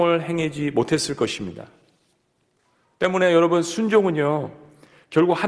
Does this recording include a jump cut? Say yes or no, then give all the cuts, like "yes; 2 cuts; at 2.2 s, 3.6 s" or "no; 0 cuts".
no; 0 cuts